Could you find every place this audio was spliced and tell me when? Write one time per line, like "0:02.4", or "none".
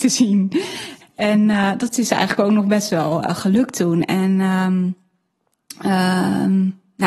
0:01.0